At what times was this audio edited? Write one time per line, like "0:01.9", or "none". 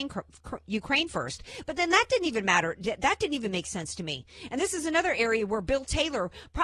none